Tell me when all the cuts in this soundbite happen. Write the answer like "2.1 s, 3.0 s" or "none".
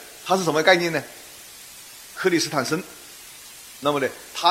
2.2 s